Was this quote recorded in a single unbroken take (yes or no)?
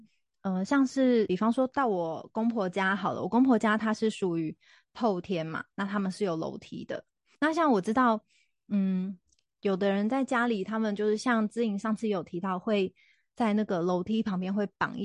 yes